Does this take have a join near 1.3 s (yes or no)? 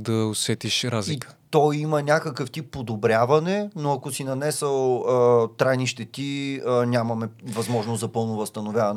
no